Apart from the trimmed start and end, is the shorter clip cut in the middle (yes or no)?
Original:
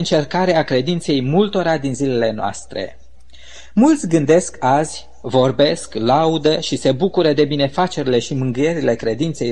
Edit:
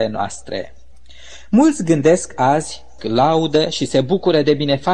yes